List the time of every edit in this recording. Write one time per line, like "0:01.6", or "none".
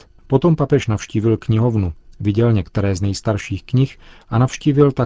none